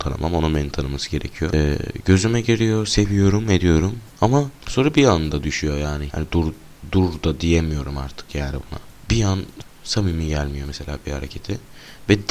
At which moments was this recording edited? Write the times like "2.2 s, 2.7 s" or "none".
6.1 s

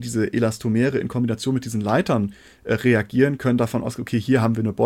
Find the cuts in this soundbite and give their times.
none

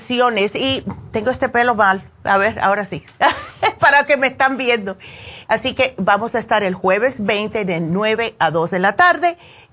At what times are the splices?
5.5 s

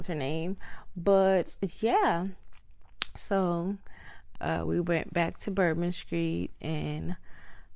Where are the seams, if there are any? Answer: 4.3 s

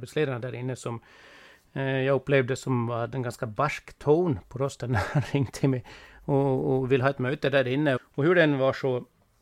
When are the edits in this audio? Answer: 8.0 s

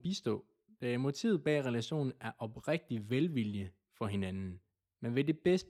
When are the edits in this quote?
none

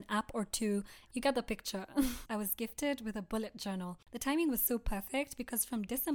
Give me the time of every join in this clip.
1.1 s, 2.3 s

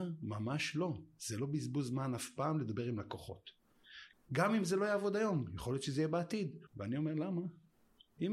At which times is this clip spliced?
4.1 s, 6.7 s

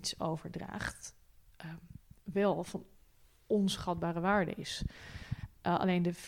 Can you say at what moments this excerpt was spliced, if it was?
none

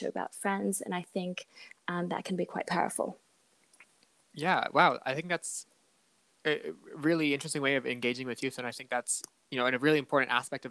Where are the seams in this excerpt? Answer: none

